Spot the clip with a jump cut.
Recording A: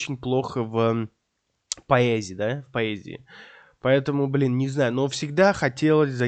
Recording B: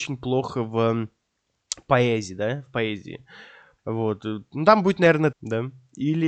B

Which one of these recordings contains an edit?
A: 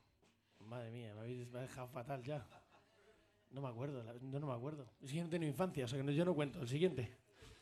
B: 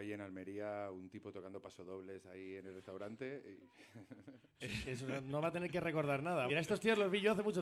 B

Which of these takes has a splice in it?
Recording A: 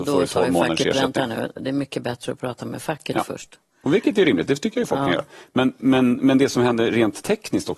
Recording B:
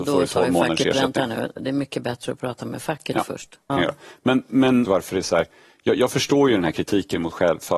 B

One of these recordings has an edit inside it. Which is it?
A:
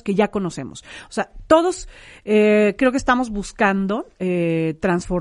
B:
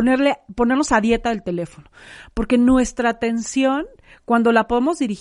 A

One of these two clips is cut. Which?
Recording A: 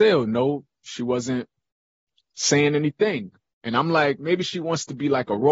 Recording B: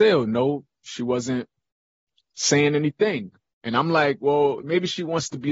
A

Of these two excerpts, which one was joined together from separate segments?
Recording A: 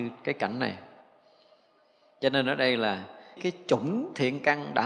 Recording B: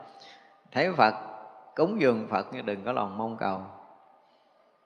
A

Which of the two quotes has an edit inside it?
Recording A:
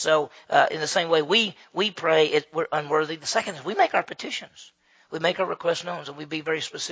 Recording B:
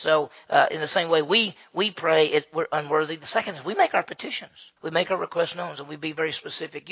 B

